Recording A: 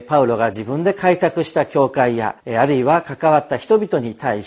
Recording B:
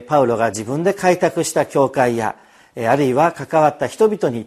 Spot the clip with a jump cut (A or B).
A